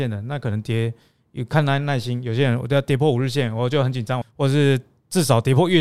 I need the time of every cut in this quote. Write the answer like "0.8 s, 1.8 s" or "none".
4.2 s